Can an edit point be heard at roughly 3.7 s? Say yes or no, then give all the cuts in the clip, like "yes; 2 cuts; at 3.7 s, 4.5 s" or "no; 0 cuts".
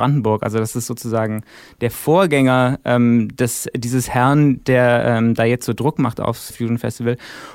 no; 1 cut; at 6.5 s